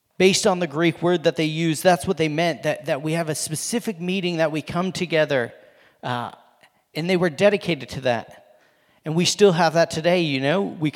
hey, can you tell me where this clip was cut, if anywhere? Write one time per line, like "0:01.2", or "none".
none